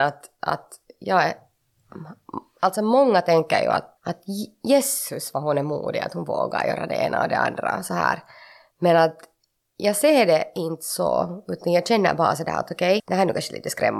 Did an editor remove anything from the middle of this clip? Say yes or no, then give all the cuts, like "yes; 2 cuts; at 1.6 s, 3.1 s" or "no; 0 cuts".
yes; 2 cuts; at 4.0 s, 13.0 s